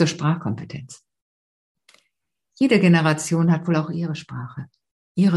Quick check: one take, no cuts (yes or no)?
yes